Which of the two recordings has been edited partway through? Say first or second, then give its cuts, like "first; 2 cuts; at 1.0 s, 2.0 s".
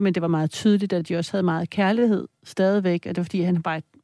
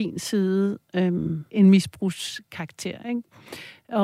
second; 1 cut; at 1.5 s